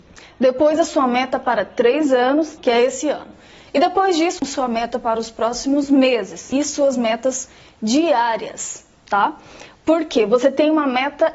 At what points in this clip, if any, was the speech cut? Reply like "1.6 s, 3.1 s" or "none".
2.6 s, 4.4 s